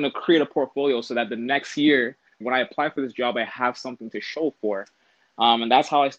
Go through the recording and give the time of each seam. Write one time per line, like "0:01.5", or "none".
0:02.4